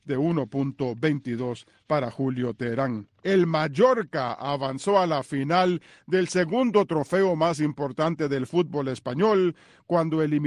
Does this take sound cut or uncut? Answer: cut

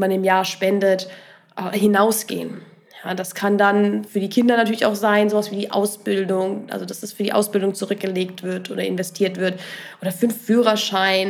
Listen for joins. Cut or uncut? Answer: uncut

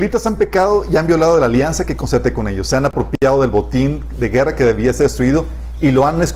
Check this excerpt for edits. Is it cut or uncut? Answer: uncut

